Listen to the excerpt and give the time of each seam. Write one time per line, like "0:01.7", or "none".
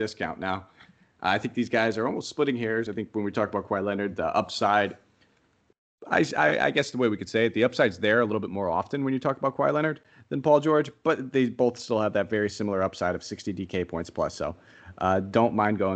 none